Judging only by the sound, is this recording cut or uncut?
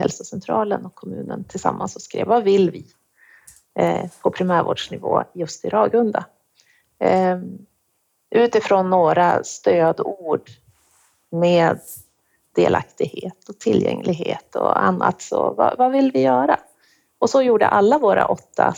uncut